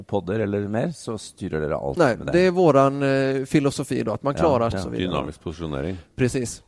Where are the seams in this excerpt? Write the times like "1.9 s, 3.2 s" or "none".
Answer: 4.7 s